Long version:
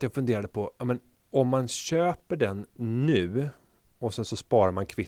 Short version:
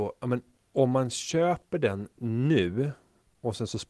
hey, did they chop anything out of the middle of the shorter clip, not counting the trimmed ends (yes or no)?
no